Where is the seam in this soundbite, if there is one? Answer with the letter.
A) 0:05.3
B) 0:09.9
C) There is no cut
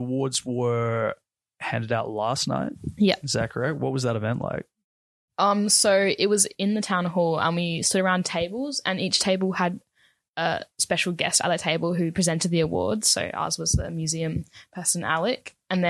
C